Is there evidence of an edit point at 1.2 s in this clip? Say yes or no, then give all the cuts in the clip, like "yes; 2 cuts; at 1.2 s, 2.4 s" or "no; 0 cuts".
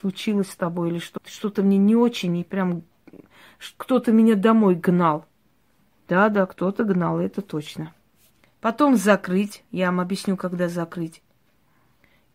yes; 2 cuts; at 1.2 s, 8.4 s